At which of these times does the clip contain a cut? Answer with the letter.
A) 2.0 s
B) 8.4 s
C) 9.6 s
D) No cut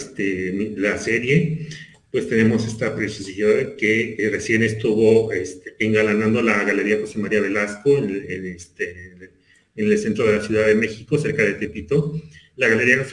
D